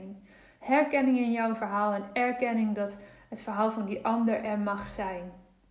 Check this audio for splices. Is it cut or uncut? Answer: uncut